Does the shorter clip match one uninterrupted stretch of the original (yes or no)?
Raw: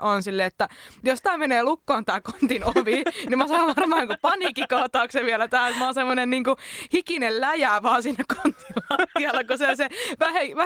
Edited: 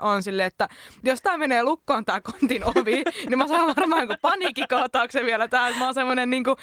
yes